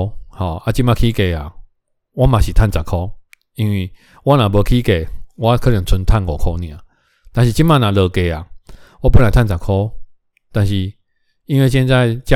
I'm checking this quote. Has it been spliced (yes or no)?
no